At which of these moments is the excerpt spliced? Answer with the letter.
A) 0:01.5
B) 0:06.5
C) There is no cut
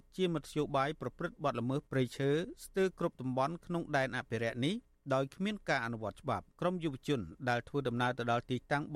B